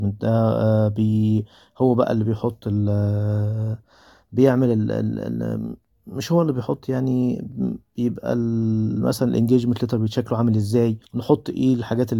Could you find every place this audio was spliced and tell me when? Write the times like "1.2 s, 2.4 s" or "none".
11.1 s